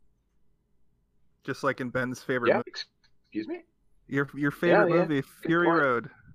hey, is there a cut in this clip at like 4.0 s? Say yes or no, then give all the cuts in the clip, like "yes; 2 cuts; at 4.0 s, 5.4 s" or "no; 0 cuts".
no; 1 cut; at 2.6 s